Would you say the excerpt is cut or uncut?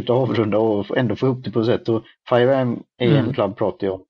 uncut